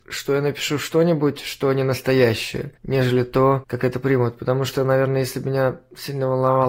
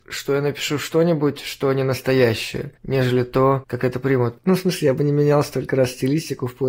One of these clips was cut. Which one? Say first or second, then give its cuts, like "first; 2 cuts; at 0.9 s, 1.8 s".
second; 1 cut; at 4.4 s